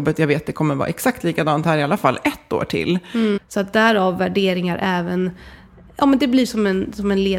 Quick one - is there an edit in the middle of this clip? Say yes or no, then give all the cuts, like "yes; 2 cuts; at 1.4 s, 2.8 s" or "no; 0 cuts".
yes; 1 cut; at 3.4 s